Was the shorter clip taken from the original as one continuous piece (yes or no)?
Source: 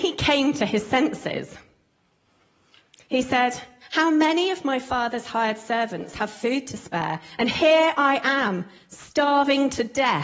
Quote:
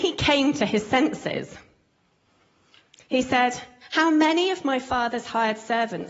yes